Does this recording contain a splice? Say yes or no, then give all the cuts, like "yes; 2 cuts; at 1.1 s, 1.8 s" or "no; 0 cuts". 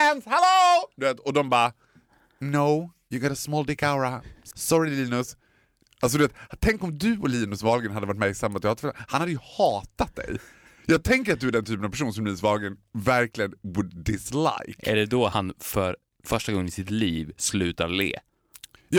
no; 0 cuts